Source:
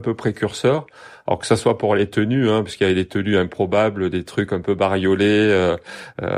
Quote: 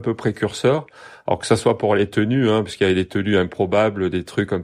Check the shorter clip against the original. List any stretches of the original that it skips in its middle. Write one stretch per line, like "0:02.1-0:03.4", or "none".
none